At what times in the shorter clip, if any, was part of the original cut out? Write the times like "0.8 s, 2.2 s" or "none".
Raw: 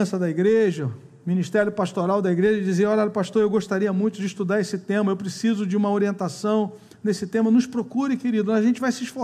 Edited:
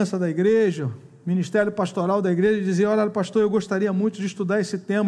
none